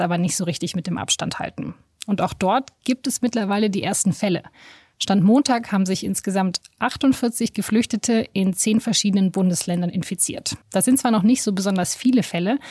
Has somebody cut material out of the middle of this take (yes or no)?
yes